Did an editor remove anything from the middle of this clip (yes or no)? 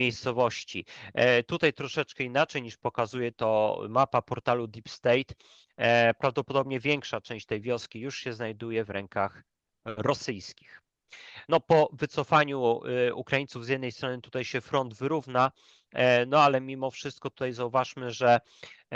no